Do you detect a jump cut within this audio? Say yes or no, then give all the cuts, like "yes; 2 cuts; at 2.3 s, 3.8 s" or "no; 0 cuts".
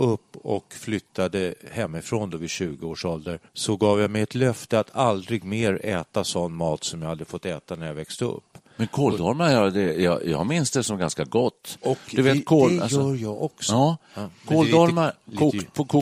yes; 1 cut; at 3.5 s